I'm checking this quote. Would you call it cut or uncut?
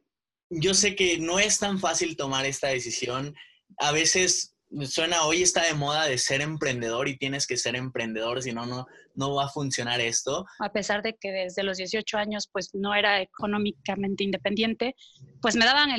cut